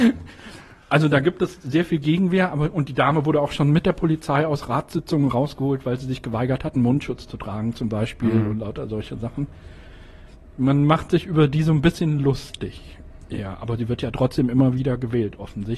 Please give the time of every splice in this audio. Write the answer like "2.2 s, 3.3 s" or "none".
none